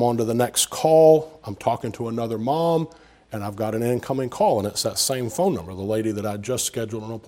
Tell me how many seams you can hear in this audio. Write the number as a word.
zero